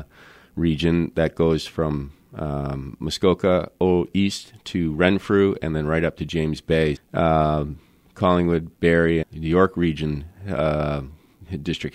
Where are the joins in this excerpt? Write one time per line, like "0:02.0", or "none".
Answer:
0:07.0
0:09.2